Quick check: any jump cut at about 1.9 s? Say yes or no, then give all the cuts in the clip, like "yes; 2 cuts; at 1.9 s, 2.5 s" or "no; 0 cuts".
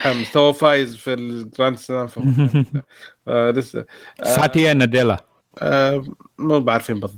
no; 1 cut; at 5.5 s